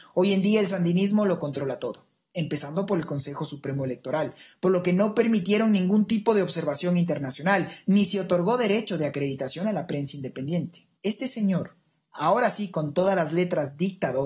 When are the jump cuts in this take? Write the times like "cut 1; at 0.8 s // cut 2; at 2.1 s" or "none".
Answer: cut 1; at 11.0 s

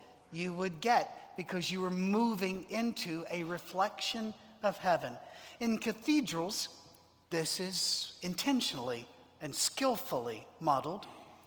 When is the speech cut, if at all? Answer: none

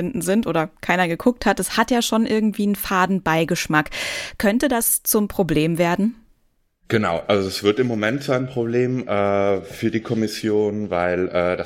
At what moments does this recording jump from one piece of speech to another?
none

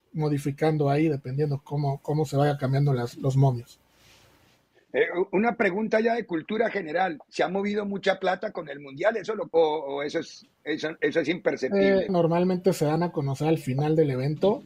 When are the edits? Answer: cut 1; at 9.5 s // cut 2; at 12.1 s

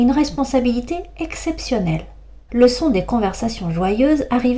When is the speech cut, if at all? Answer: cut 1; at 2.5 s

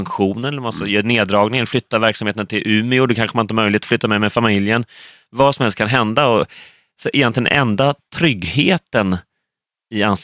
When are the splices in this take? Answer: none

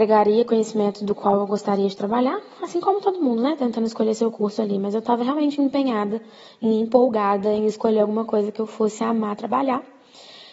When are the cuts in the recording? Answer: none

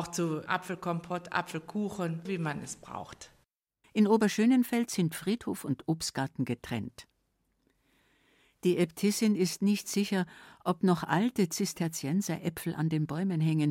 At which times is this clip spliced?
cut 1; at 2.3 s // cut 2; at 3.8 s

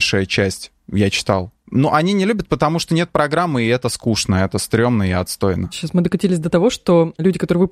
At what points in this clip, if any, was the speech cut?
none

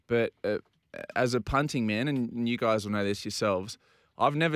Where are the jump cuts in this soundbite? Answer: none

